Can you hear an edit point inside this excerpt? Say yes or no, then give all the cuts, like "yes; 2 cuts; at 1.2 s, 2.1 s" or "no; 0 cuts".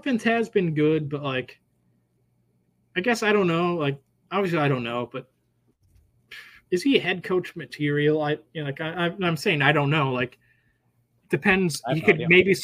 no; 0 cuts